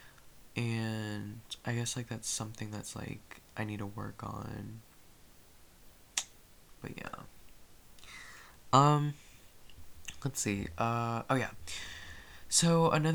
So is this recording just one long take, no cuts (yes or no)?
yes